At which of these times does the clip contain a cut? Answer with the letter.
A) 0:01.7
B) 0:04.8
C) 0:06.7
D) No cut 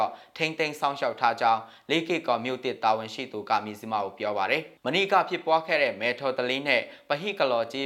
B